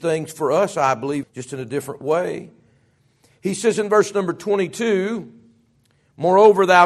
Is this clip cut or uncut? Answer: cut